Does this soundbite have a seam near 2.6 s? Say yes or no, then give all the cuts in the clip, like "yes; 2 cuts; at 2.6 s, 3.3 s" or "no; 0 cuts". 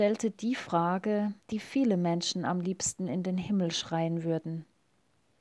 no; 1 cut; at 1.4 s